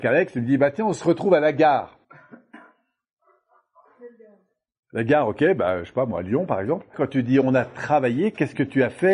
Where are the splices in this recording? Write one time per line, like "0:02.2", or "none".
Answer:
0:02.0
0:06.9